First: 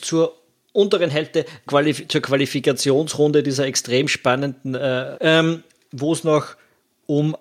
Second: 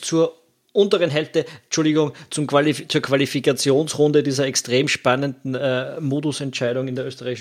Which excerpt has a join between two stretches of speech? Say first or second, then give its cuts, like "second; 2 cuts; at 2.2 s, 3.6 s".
first; 2 cuts; at 1.7 s, 5.1 s